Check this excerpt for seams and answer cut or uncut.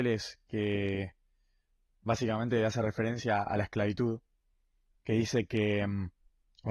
uncut